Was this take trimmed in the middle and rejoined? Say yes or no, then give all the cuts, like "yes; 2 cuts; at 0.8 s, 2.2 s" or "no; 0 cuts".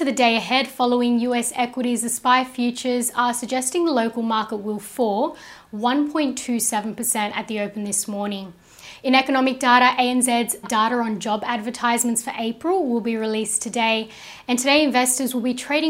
yes; 1 cut; at 10.6 s